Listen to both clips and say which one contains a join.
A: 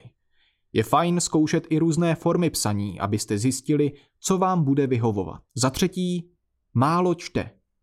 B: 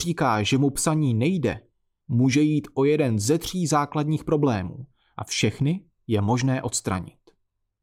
A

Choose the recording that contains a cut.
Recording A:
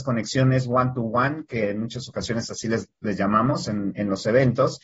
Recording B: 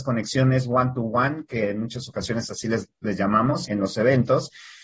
B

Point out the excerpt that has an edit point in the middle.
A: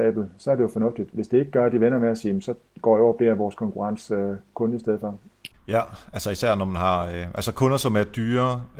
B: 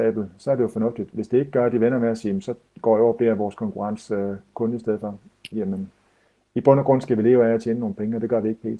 A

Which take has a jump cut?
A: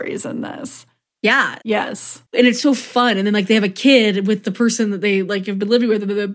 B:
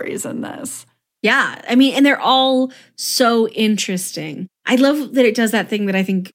A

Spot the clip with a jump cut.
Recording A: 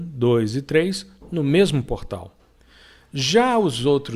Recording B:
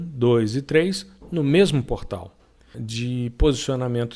B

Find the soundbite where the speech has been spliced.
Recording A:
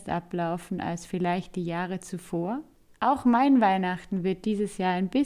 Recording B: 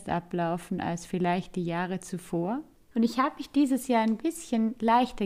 B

